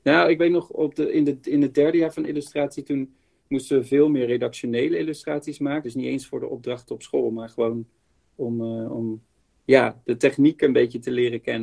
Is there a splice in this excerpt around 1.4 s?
no; 1 cut; at 5.8 s

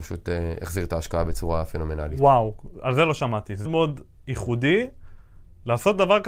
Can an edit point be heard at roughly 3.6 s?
yes; 1 cut; at 3.6 s

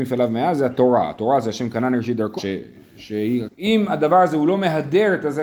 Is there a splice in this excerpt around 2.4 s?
yes; 2 cuts; at 2.4 s, 3.5 s

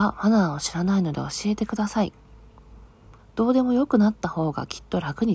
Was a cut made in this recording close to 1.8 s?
no; 1 cut; at 3.2 s

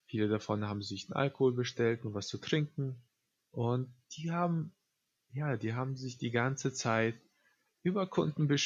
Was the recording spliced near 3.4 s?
yes; 1 cut; at 3.4 s

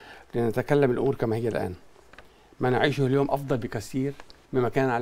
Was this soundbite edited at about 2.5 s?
no; 0 cuts

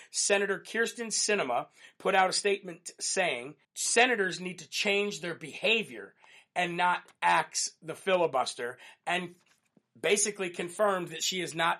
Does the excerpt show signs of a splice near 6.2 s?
no; 1 cut; at 3.6 s

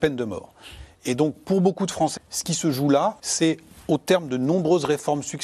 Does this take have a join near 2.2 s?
yes; 2 cuts; at 2.2 s, 3.2 s

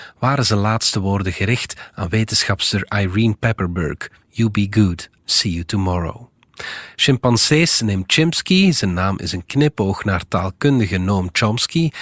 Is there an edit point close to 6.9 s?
no; 1 cut; at 5.2 s

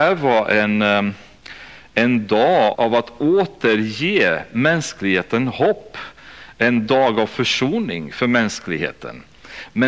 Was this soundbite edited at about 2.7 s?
yes; 1 cut; at 2.7 s

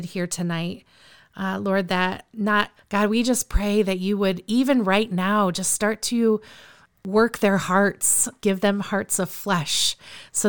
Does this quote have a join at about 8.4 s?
yes; 2 cuts; at 2.8 s, 8.4 s

